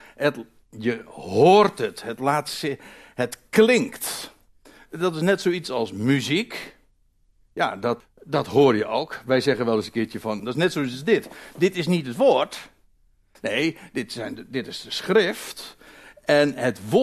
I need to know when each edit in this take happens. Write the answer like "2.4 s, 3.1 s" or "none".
8.0 s, 10.4 s